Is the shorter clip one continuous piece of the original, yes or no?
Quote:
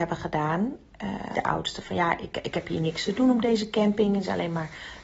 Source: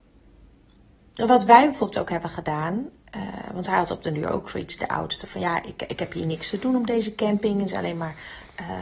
no